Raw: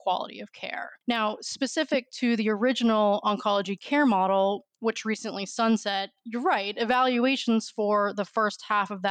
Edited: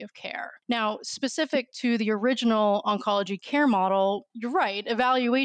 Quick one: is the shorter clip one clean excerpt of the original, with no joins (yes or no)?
no